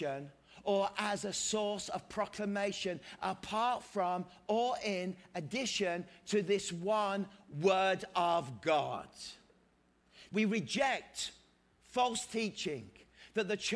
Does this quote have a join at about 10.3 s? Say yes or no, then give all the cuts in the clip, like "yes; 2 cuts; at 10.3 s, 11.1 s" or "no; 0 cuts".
yes; 1 cut; at 10.3 s